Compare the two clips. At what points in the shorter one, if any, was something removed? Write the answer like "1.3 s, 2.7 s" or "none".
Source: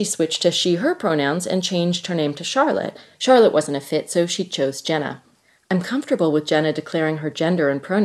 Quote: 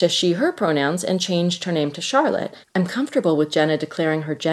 2.6 s